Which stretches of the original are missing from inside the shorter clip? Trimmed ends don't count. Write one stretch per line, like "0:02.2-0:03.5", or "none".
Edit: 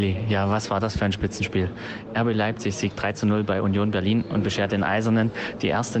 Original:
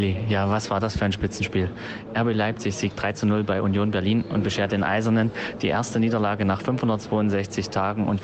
none